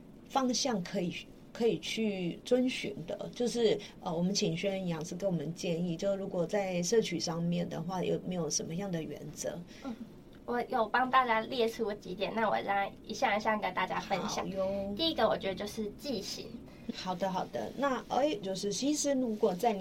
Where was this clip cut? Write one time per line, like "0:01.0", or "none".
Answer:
0:16.9
0:18.4